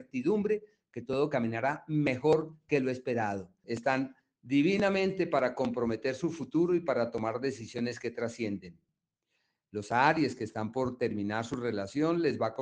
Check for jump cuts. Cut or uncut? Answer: cut